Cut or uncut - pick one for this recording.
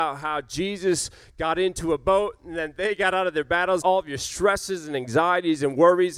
cut